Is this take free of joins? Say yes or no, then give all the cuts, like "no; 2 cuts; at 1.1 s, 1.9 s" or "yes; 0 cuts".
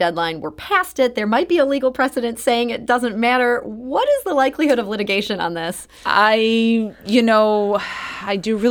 yes; 0 cuts